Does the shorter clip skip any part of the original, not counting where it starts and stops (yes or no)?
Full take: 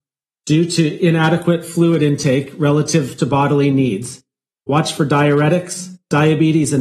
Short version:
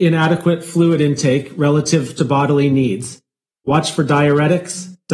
no